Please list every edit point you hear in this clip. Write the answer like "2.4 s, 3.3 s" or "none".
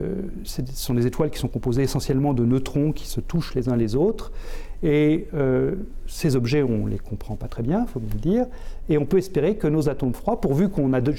4.8 s